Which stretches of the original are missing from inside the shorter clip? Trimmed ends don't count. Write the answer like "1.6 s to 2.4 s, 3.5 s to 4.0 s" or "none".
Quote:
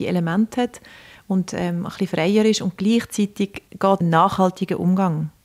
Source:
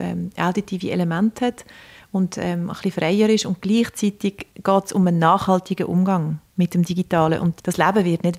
4.8 s to 5.1 s

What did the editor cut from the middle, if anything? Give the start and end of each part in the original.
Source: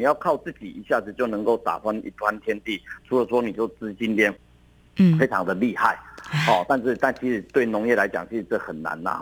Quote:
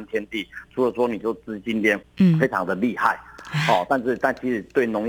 4.4 s to 4.9 s

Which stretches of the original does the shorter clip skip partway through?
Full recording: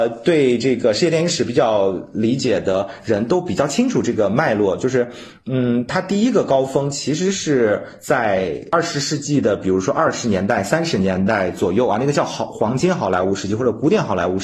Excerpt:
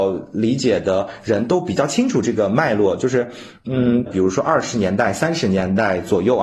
5.9 s to 9.6 s

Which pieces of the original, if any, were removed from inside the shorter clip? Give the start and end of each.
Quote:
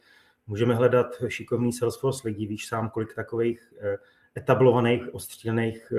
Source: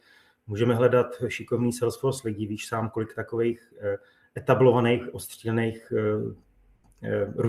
none

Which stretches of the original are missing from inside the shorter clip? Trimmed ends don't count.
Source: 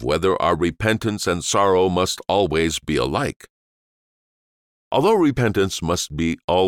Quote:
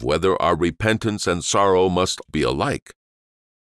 2.3 s to 2.8 s

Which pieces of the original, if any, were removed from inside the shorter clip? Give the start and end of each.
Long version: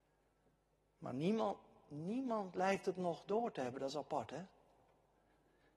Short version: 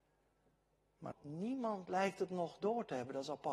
1.1 s to 1.8 s

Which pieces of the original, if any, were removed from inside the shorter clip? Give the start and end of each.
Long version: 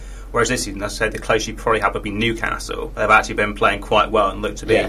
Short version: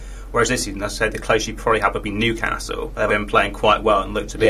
3.1 s to 3.4 s

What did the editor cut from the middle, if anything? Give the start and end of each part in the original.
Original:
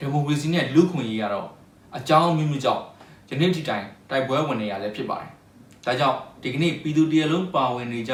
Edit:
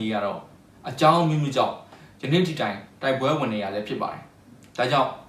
none

